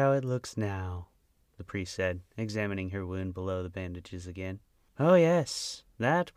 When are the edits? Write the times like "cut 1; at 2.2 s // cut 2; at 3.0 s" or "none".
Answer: none